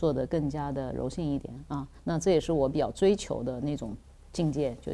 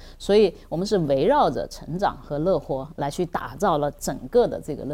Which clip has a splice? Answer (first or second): first